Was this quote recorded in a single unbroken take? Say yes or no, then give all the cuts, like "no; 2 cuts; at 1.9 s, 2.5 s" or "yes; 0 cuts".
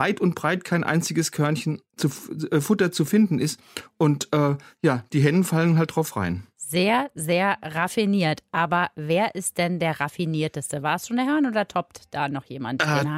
yes; 0 cuts